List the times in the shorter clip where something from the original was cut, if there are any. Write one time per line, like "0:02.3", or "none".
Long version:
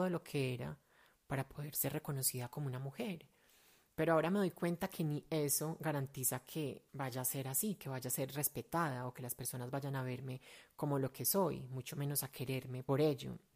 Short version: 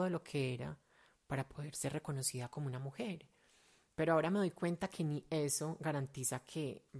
none